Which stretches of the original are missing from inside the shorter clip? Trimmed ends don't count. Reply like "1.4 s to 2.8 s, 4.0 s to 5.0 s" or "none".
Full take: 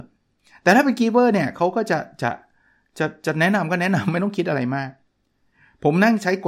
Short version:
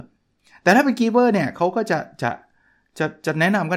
none